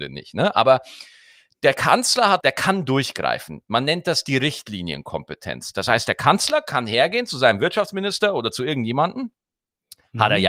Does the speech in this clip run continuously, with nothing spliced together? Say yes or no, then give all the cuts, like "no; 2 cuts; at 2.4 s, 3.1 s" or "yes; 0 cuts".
no; 1 cut; at 2.4 s